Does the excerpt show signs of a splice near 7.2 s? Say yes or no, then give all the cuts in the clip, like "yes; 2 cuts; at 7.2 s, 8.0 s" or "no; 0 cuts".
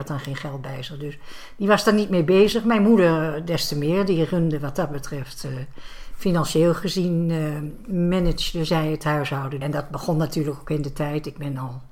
no; 1 cut; at 9.6 s